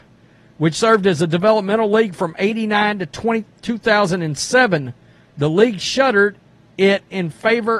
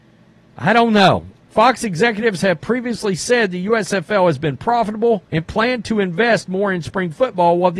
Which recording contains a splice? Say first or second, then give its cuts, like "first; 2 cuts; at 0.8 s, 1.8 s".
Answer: second; 2 cuts; at 1.3 s, 5.3 s